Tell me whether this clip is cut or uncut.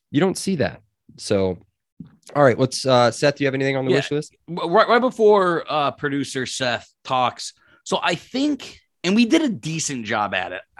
uncut